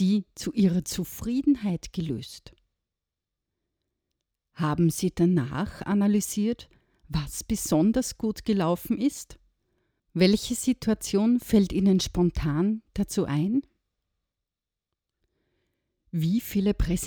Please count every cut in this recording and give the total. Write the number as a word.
one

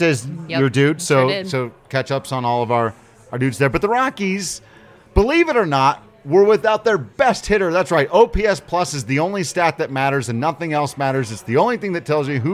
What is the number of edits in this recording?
zero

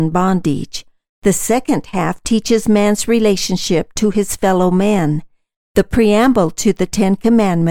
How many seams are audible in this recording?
one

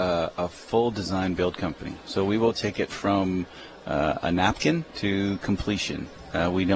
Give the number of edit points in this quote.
one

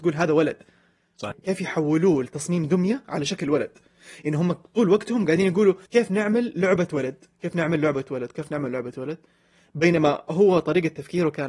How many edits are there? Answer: two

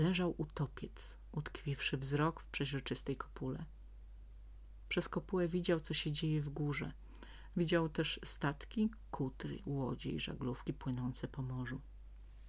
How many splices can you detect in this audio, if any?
zero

